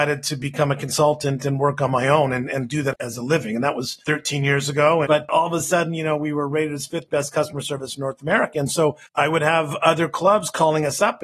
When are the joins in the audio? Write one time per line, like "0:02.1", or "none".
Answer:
0:05.0